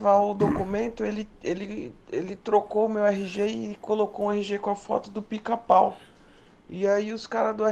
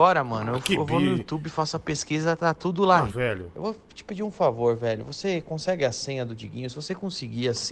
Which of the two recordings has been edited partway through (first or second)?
second